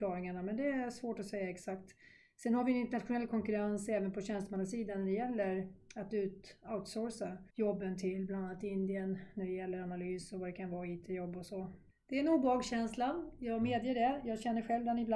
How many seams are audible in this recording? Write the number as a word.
two